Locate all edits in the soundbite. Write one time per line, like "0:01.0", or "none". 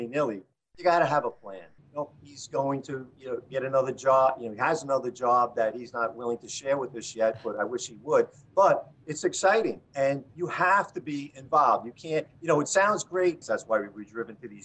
0:01.8
0:09.8
0:13.4